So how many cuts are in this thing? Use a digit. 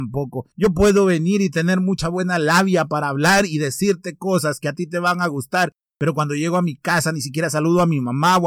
0